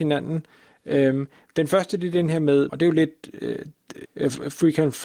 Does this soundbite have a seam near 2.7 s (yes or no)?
yes